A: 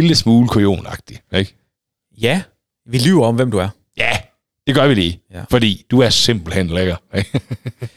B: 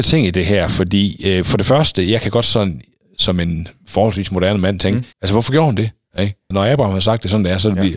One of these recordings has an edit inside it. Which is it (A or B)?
B